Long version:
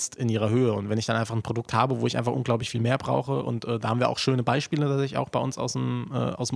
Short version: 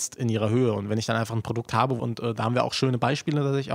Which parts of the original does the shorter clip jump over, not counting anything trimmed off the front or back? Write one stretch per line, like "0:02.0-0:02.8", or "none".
0:02.0-0:03.4